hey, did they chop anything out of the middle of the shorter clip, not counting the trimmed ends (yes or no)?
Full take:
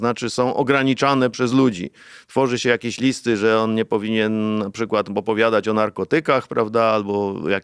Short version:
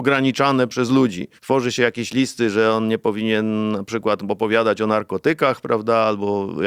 yes